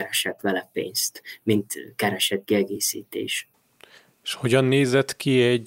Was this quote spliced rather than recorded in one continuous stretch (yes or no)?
no